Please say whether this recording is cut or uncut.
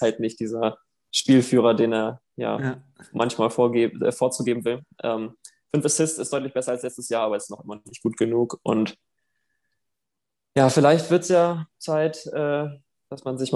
uncut